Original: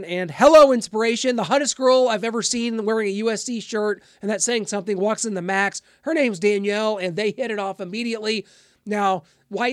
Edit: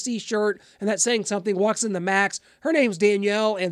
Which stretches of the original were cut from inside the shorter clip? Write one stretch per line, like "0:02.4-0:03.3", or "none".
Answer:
none